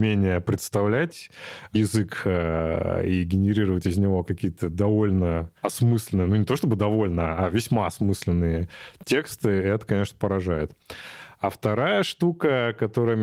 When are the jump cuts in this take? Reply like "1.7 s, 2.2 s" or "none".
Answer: 5.6 s